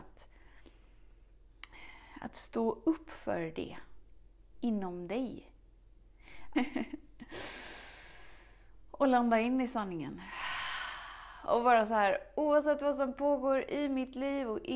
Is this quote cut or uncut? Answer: cut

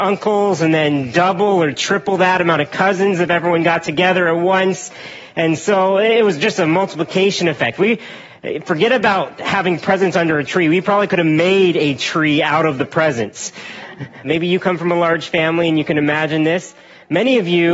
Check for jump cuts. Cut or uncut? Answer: cut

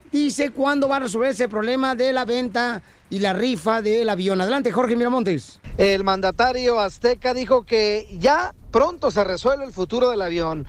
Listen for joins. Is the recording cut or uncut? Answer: uncut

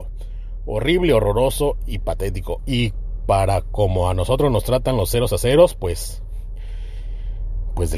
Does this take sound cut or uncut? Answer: uncut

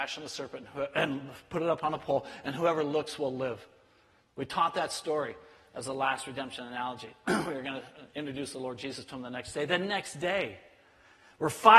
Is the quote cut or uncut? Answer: uncut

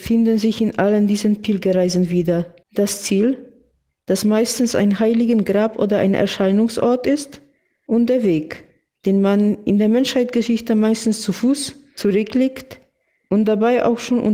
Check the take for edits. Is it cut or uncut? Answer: cut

